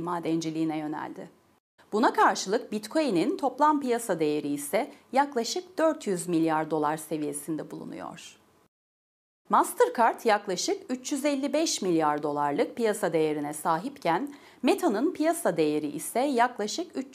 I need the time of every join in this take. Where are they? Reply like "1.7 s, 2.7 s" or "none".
1.8 s, 9.4 s